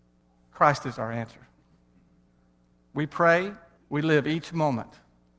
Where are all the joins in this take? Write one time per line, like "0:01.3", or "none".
0:03.8